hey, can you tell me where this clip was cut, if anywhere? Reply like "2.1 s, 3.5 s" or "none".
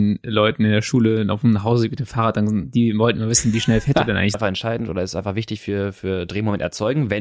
4.3 s